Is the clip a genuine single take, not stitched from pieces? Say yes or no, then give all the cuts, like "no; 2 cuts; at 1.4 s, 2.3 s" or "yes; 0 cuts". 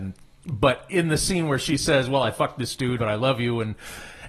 no; 1 cut; at 3.0 s